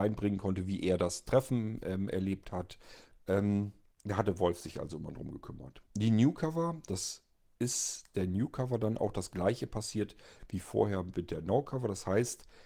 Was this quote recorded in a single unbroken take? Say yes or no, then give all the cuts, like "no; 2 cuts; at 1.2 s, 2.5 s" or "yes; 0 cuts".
no; 2 cuts; at 3.1 s, 5.9 s